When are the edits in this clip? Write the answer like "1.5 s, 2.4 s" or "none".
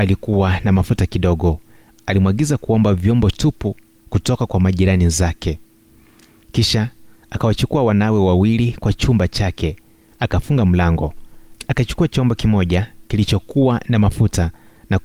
none